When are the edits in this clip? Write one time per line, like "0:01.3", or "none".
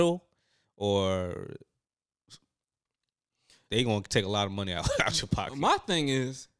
none